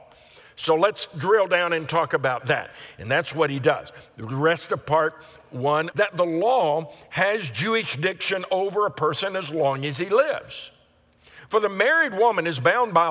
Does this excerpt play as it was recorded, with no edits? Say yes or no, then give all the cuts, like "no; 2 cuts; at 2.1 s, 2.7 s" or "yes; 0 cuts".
no; 1 cut; at 5.9 s